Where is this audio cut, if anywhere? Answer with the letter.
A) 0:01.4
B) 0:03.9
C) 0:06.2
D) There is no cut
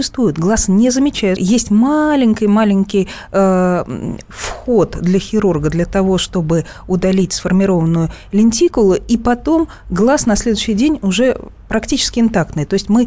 A